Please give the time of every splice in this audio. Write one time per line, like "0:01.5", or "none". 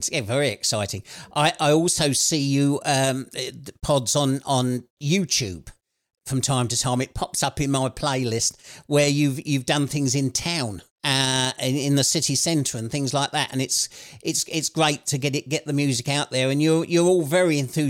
0:10.9